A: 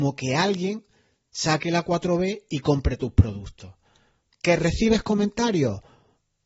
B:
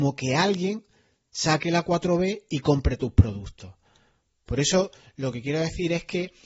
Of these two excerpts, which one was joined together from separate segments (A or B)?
A